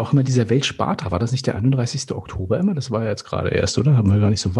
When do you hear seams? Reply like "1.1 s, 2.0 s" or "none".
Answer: none